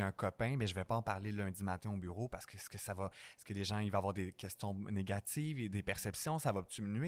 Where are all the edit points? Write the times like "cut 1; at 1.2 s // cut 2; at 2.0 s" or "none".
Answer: none